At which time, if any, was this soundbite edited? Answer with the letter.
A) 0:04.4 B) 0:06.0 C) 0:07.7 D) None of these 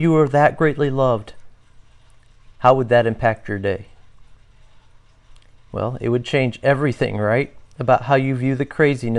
D